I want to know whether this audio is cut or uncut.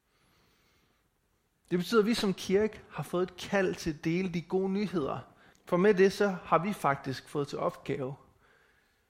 cut